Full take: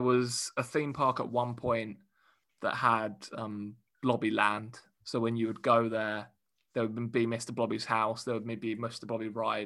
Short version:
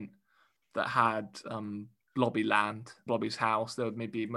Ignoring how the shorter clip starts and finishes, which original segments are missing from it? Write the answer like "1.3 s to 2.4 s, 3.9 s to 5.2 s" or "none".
4.9 s to 7.6 s